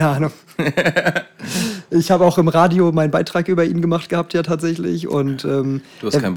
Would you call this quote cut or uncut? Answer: uncut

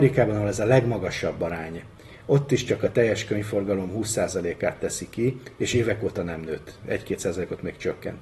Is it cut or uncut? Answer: uncut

